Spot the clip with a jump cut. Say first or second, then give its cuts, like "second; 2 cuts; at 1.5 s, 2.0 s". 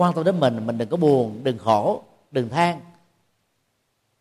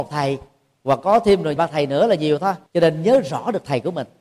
second; 2 cuts; at 1.6 s, 2.7 s